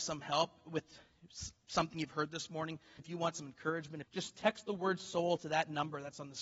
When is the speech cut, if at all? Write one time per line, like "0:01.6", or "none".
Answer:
0:03.0
0:04.0